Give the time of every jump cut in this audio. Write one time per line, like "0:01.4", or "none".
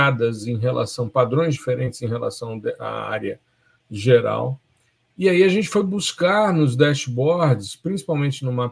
none

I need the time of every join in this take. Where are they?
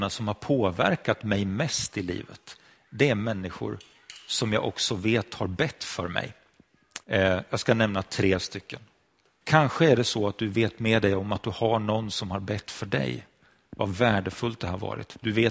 0:07.0
0:09.4

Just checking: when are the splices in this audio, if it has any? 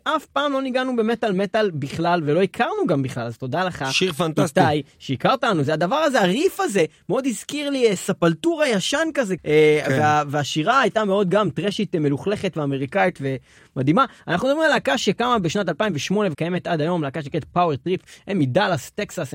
none

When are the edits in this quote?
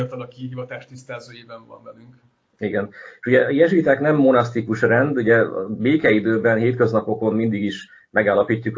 none

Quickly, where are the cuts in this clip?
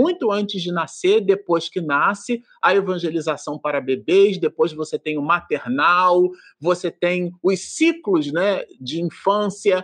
none

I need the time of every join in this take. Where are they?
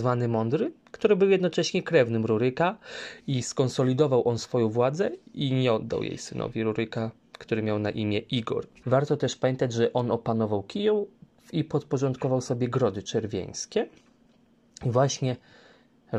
0:08.8

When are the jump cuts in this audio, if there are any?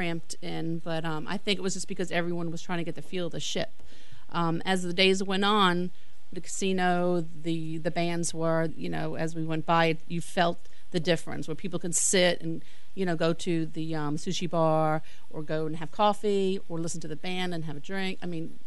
0:06.3
0:08.7

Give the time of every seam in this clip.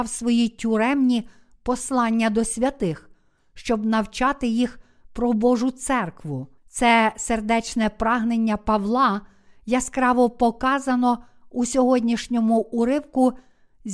0:06.6

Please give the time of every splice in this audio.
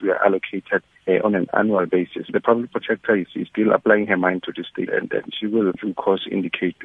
0:04.9

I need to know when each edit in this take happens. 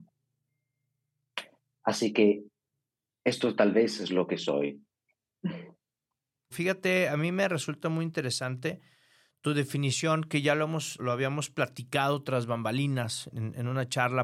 0:06.5
0:11.0
0:13.3

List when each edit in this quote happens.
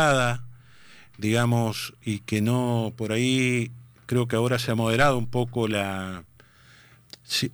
none

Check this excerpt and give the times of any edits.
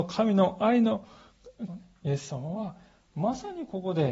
0:01.7

